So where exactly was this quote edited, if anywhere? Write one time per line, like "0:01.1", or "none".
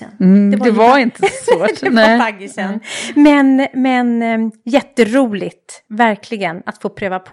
none